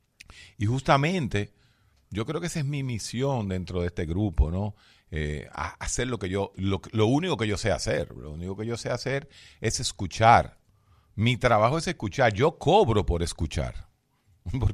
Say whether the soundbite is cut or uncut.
uncut